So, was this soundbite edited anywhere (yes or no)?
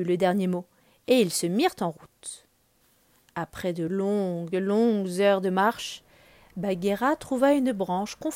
no